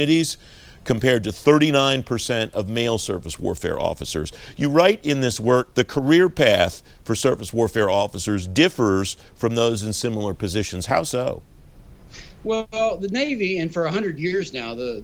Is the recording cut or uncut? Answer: cut